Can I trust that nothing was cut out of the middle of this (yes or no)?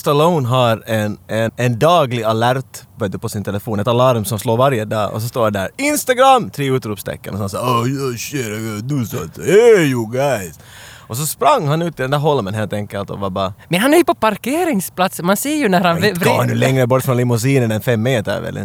no